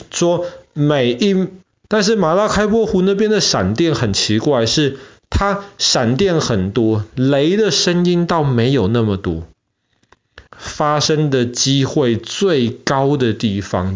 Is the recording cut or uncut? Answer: cut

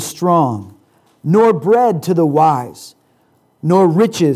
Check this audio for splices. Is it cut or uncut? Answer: uncut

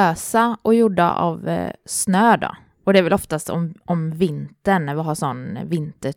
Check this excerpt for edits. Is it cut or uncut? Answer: uncut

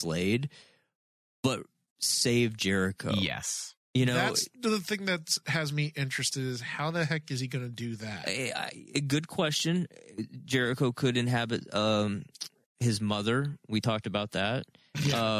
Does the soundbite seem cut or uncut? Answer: uncut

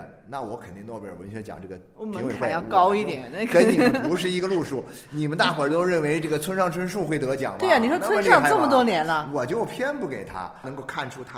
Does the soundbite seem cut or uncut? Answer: uncut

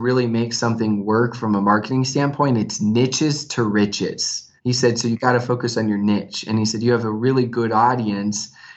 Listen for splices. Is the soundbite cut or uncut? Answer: cut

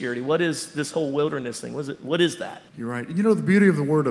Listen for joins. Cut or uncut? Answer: cut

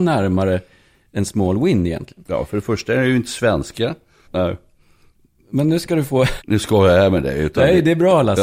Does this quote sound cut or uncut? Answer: cut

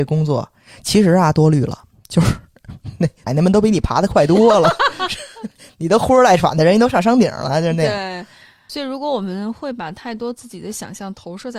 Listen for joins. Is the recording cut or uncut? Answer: cut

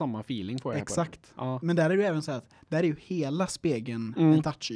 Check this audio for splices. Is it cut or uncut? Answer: uncut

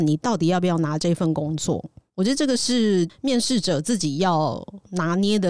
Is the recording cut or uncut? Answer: uncut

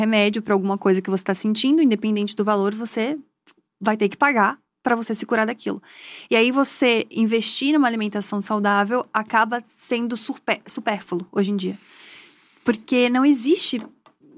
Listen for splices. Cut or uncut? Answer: uncut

